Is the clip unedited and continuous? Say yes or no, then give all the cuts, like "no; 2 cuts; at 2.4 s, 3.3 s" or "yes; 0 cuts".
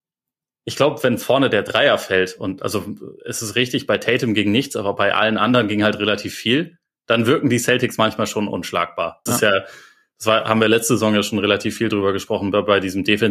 no; 1 cut; at 9.3 s